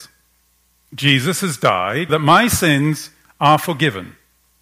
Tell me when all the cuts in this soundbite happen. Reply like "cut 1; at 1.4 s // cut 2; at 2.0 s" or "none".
cut 1; at 2.1 s

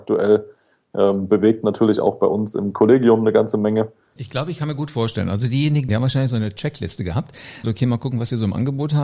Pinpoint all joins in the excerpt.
cut 1; at 4.2 s // cut 2; at 5.9 s // cut 3; at 7.6 s

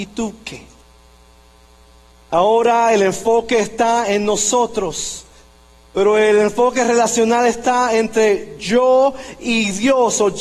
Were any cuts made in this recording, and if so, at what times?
none

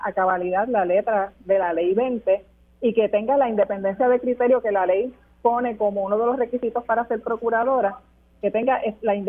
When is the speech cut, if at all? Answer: none

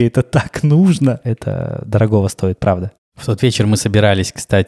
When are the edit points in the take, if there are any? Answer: cut 1; at 1.2 s

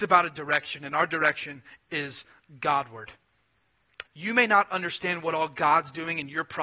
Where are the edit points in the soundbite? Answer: cut 1; at 4.0 s

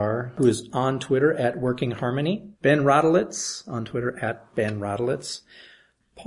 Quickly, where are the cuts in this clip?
cut 1; at 2.5 s

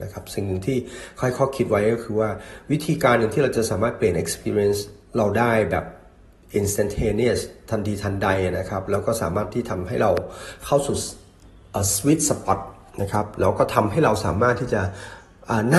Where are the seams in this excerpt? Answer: none

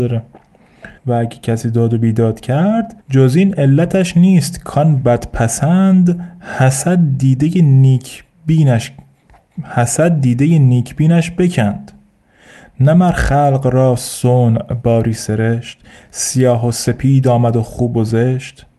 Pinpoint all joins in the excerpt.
cut 1; at 1.0 s // cut 2; at 3.0 s

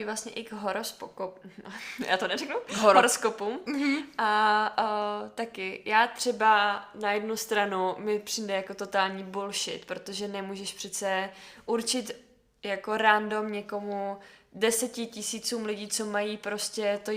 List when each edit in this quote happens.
none

